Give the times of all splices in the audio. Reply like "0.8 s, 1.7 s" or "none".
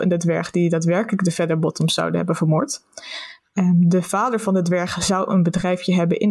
none